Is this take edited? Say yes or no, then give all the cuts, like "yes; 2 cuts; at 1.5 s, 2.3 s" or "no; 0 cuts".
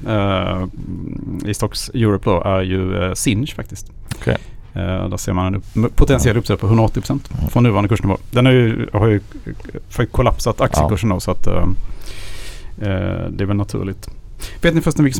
no; 0 cuts